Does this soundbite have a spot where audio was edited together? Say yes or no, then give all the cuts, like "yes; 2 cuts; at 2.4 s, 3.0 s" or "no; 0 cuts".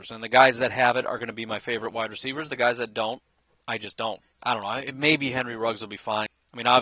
yes; 1 cut; at 4.3 s